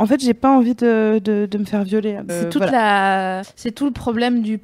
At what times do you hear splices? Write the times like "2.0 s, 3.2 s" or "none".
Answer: 2.3 s, 3.4 s